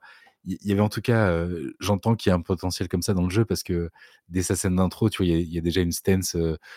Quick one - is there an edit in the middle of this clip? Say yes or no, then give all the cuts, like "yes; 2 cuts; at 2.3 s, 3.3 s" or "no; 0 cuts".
no; 0 cuts